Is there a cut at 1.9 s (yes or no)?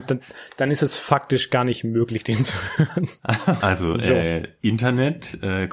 no